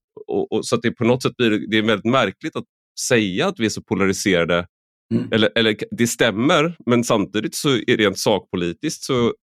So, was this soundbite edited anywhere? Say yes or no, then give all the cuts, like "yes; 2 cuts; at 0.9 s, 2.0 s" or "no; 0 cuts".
no; 0 cuts